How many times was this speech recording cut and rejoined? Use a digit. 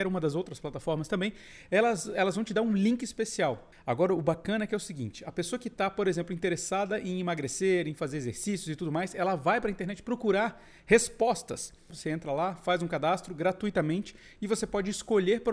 2